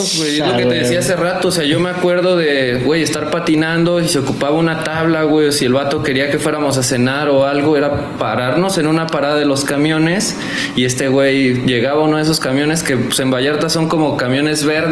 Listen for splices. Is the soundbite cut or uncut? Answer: uncut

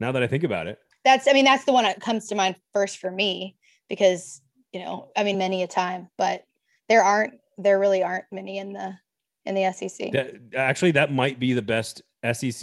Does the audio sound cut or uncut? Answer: cut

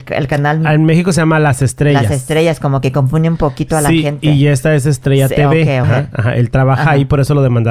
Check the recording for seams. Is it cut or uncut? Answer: cut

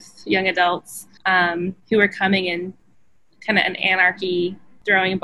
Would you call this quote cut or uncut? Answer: cut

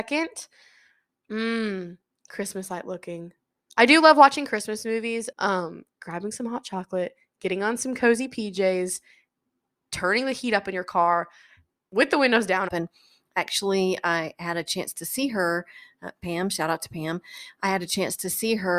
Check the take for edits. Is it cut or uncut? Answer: cut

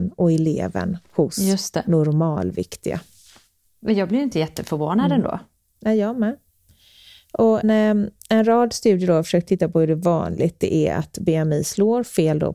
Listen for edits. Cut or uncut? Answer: cut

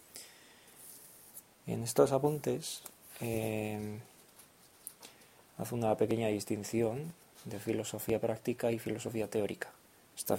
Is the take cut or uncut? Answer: uncut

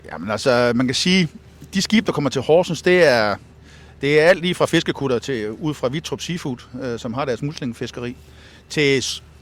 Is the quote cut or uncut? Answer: uncut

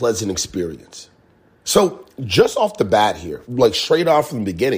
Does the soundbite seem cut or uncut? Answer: cut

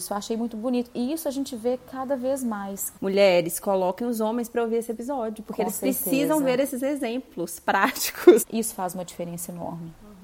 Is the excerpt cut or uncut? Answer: cut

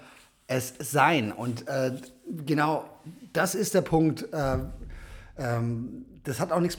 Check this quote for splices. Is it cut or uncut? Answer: uncut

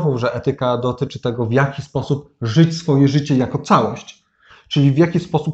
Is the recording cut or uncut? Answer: uncut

